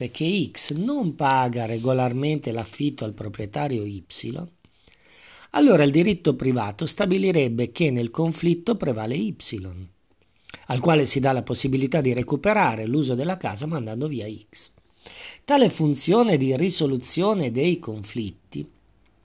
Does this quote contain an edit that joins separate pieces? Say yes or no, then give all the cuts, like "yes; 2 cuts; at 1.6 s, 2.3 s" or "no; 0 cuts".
no; 0 cuts